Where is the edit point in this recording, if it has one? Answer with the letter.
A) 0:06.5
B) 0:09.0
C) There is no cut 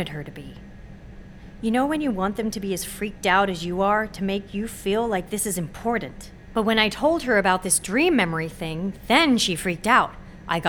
A